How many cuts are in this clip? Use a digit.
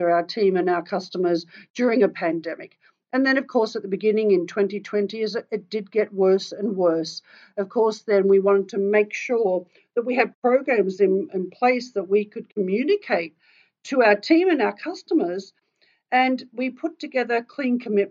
0